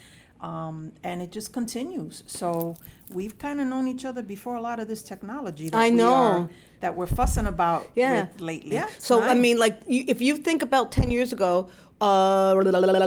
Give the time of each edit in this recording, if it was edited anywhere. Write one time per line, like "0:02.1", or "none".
0:08.7